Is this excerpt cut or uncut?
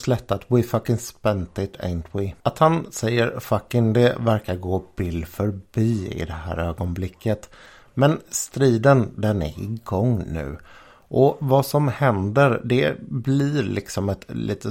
cut